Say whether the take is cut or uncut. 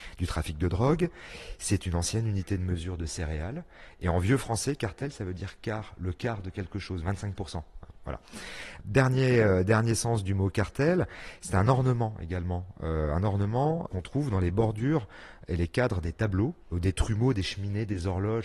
uncut